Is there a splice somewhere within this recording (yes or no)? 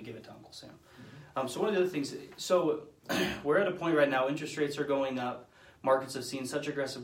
no